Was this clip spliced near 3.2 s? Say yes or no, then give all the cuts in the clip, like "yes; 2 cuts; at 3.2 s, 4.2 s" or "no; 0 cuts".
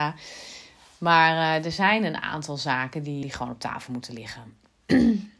yes; 1 cut; at 3.2 s